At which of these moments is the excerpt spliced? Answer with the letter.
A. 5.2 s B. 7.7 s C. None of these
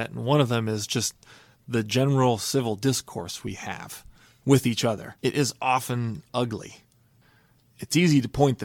A